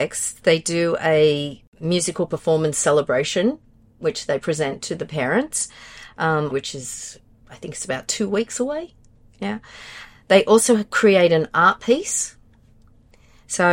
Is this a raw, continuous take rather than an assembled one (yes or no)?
no